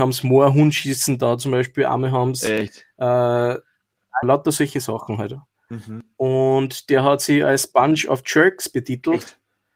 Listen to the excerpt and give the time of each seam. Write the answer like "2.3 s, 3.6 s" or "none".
4.2 s